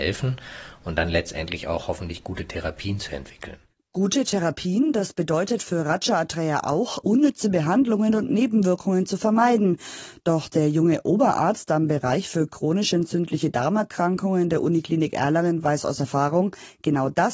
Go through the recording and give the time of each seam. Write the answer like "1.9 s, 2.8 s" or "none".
none